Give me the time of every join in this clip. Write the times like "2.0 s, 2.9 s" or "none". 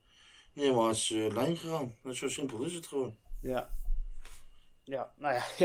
none